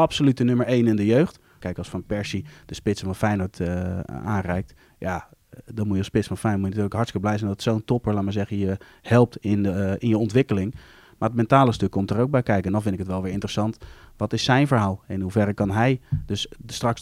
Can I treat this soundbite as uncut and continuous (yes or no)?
no